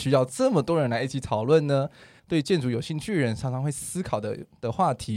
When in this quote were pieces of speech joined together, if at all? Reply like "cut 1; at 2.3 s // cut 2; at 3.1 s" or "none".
cut 1; at 2.2 s

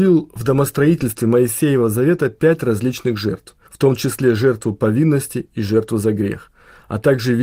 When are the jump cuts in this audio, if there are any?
cut 1; at 3.7 s

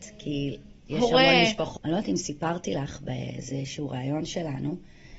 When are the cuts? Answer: cut 1; at 1.8 s

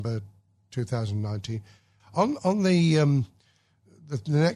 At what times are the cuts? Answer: cut 1; at 2.0 s

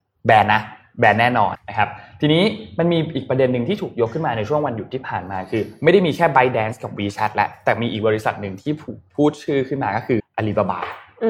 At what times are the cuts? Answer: cut 1; at 1.5 s // cut 2; at 10.2 s

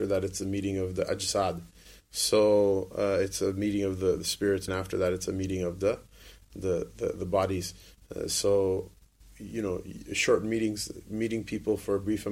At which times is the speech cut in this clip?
cut 1; at 4.7 s

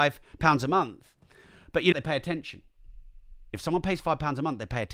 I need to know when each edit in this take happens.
cut 1; at 1.9 s // cut 2; at 3.5 s

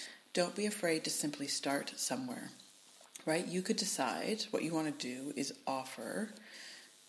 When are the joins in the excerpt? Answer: none

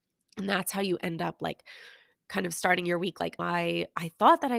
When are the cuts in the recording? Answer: cut 1; at 3.4 s

